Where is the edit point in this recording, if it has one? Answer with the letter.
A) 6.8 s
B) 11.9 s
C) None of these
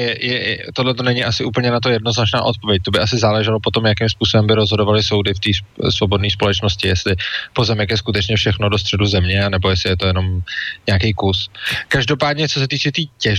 C